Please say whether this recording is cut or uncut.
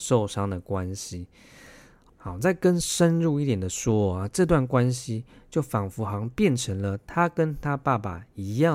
uncut